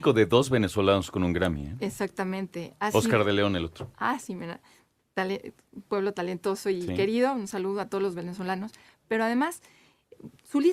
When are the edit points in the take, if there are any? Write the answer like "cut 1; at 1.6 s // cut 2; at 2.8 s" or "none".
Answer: none